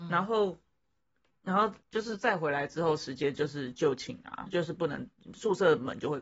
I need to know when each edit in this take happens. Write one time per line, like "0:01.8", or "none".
0:01.8
0:04.5